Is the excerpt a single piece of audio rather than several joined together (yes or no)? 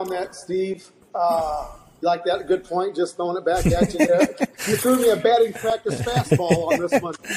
yes